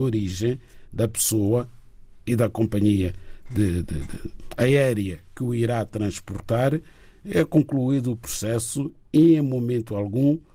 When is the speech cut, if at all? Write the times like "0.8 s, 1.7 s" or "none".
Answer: 3.8 s